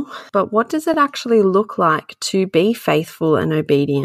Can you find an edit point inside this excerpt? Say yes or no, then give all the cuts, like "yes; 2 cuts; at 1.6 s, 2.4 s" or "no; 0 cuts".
no; 0 cuts